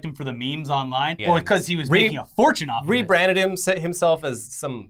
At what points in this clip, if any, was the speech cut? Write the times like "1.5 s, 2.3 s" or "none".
1.2 s